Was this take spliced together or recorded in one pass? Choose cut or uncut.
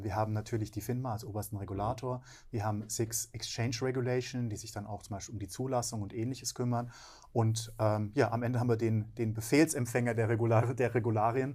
uncut